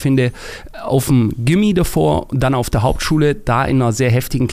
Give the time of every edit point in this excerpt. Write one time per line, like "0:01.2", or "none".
none

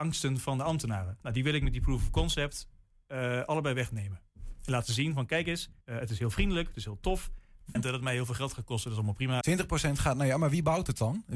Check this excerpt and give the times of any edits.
0:05.8
0:07.7
0:09.4

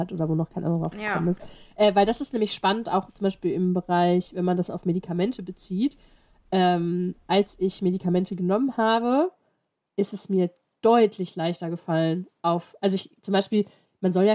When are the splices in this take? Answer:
none

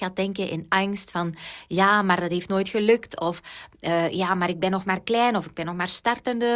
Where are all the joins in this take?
none

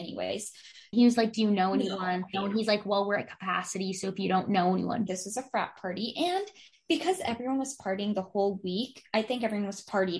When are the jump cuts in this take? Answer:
0:00.9
0:02.3
0:05.1

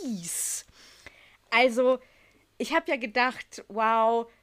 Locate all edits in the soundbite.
none

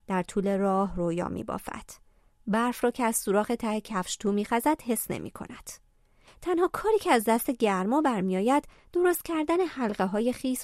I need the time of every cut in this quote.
none

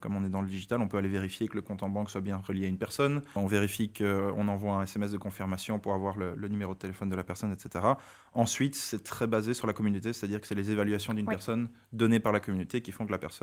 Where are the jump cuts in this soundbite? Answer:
none

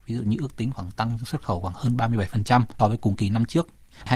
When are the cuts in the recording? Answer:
0:02.8

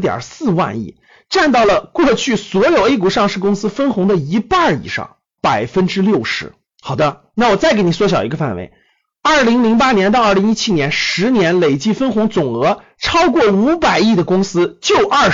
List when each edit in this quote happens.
0:05.4
0:06.7

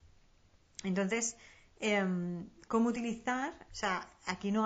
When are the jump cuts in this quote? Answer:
0:03.7

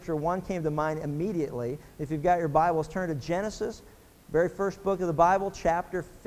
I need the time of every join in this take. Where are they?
none

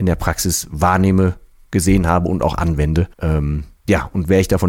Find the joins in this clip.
0:03.1

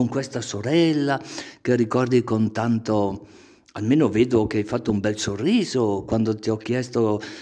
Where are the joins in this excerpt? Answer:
none

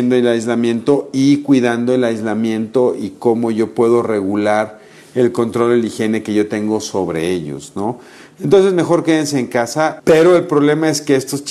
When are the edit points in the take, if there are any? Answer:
0:10.0

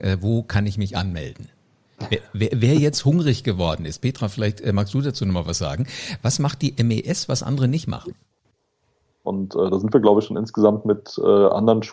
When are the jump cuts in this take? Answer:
0:09.2

